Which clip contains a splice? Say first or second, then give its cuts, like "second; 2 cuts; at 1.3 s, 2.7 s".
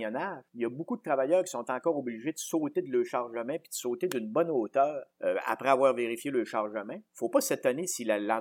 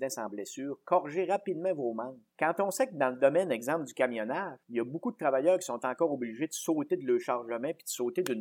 first; 1 cut; at 7.1 s